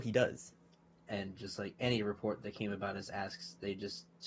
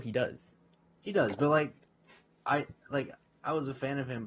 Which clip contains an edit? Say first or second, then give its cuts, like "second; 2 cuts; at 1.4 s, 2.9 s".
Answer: first; 1 cut; at 1.0 s